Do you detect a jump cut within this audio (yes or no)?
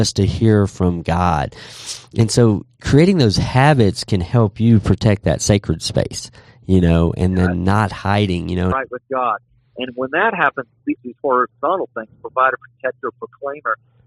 yes